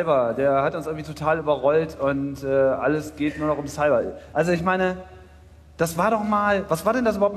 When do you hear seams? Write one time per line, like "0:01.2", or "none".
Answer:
0:04.3